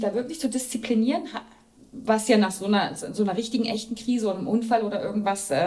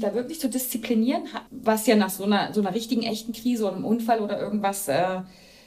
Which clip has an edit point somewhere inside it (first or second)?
second